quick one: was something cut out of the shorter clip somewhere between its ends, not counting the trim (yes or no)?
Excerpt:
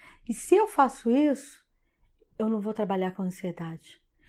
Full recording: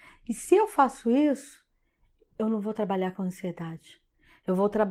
no